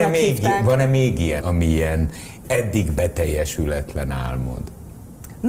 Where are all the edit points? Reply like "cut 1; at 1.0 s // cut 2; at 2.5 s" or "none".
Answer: cut 1; at 1.4 s // cut 2; at 2.4 s